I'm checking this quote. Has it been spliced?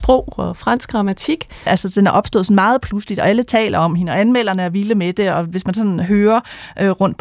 yes; 1 cut; at 1.7 s

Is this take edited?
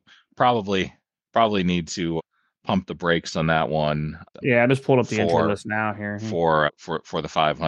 yes; 1 cut; at 4.3 s

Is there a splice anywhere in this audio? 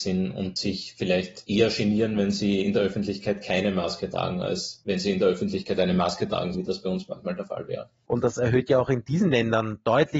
yes; 2 cuts; at 6.5 s, 8.1 s

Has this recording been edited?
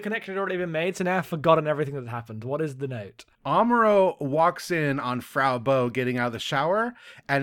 yes; 1 cut; at 3.3 s

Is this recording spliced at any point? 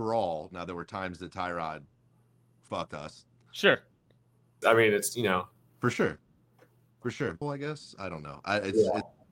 yes; 2 cuts; at 4.6 s, 7.4 s

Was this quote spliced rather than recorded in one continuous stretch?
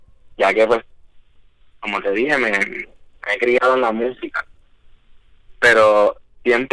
no; 0 cuts

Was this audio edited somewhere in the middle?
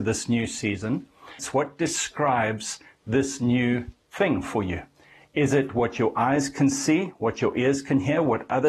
yes; 1 cut; at 1.4 s

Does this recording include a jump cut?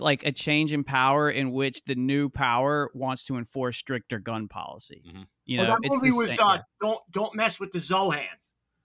no; 0 cuts

